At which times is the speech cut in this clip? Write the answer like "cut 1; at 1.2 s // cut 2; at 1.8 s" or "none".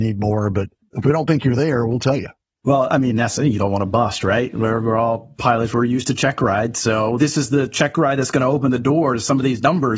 none